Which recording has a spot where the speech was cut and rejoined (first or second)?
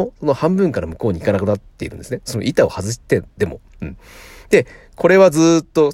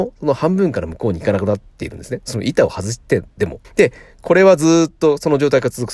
second